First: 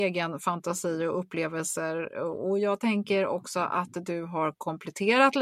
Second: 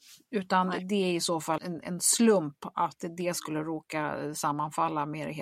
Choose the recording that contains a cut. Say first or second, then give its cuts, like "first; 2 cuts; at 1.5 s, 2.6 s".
second; 1 cut; at 1.6 s